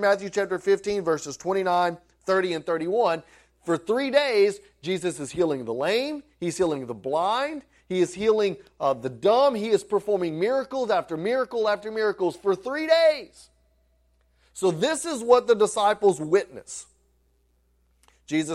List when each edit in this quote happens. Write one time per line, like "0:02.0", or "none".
none